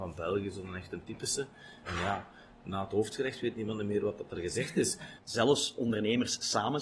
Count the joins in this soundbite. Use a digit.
2